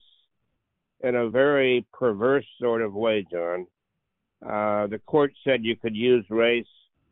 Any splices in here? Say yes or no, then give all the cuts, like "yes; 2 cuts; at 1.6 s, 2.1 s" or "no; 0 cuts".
no; 0 cuts